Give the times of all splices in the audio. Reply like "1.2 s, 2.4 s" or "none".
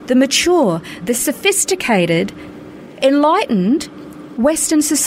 1.0 s